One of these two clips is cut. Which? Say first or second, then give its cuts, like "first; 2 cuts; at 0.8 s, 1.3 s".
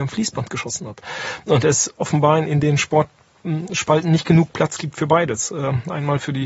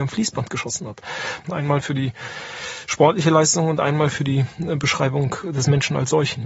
second; 1 cut; at 1.4 s